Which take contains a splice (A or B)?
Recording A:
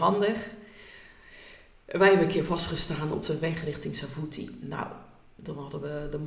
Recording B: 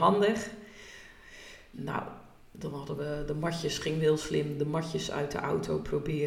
B